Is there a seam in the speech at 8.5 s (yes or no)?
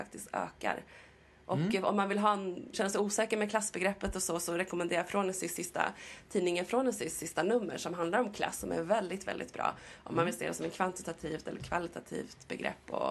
no